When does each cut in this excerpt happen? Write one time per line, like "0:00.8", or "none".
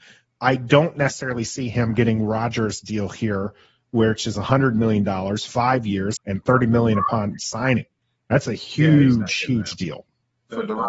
0:06.2